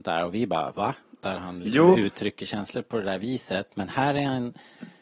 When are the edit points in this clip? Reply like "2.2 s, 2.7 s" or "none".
1.0 s